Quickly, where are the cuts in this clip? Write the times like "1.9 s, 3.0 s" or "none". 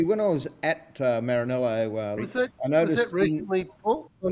2.2 s